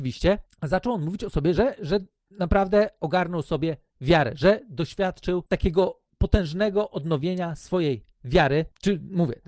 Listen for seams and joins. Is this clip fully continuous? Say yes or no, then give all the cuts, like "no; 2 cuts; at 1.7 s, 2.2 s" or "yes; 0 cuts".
yes; 0 cuts